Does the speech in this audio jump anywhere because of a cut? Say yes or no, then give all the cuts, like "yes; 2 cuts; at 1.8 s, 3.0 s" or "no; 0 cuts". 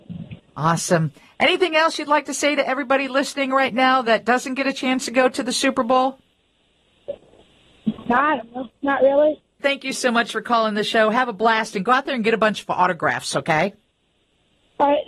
yes; 1 cut; at 9.6 s